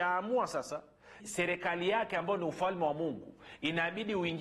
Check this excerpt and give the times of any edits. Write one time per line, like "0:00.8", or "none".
0:01.2